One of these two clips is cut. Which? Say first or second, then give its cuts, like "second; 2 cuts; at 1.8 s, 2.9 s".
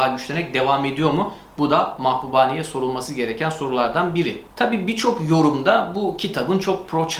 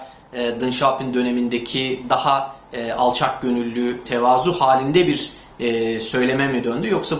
second; 1 cut; at 4.0 s